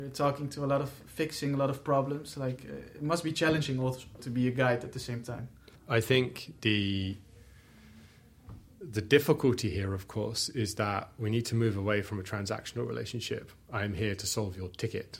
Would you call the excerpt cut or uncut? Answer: cut